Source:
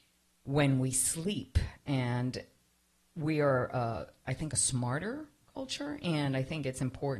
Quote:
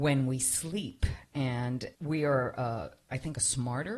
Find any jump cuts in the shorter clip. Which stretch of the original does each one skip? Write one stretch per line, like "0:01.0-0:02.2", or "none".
0:02.5-0:03.1